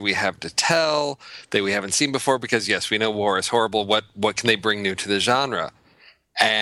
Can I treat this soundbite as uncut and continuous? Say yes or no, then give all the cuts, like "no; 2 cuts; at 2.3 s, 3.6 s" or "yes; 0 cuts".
yes; 0 cuts